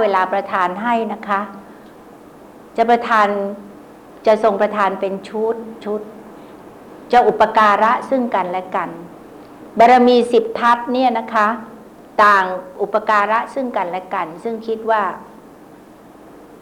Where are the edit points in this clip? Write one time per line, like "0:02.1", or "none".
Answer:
none

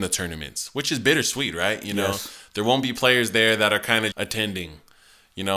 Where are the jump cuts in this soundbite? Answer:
0:04.1

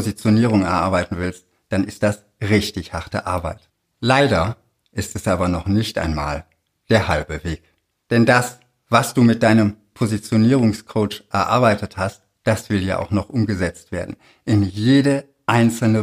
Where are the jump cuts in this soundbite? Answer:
none

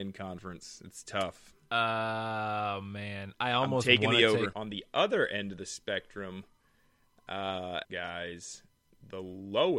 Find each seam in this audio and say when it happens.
0:04.5
0:07.8

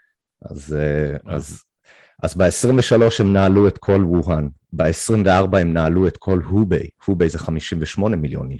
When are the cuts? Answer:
none

